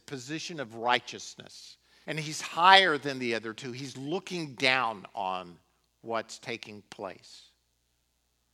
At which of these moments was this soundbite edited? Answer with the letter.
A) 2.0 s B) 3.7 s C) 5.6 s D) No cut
A